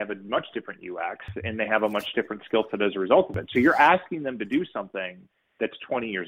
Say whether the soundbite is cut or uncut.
uncut